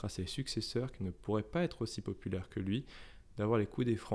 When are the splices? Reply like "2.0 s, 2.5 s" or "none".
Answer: none

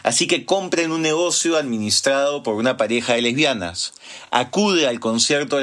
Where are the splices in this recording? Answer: none

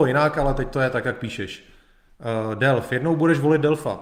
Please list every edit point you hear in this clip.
none

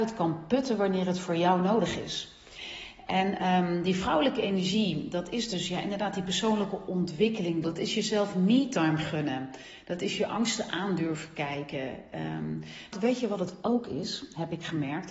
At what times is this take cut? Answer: 7.6 s, 12.9 s

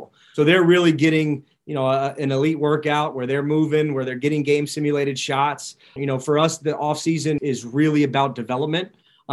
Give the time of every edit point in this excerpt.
6.0 s, 7.4 s

